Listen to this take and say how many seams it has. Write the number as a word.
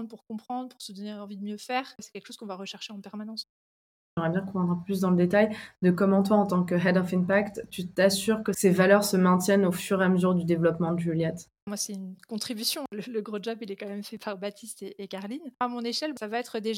zero